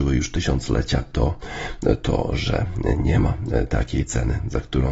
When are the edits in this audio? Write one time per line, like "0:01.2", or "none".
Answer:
none